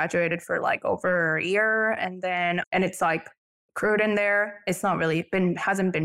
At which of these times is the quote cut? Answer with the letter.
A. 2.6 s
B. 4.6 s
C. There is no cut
A